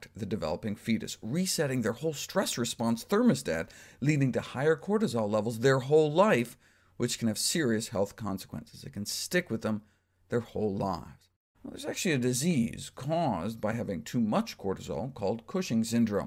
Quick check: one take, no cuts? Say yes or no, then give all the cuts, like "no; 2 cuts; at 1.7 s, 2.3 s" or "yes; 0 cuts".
no; 1 cut; at 11.5 s